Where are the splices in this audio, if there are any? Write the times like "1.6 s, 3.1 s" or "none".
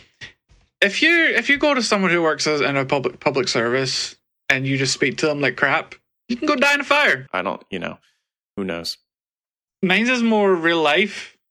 7.3 s, 9.7 s